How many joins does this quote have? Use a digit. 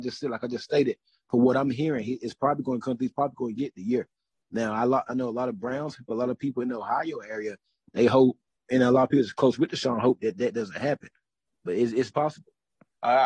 1